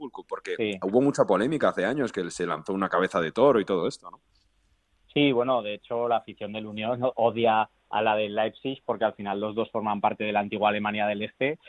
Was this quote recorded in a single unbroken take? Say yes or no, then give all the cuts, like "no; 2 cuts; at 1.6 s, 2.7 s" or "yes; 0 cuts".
yes; 0 cuts